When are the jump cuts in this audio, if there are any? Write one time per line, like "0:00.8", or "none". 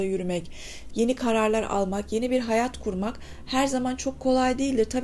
0:00.9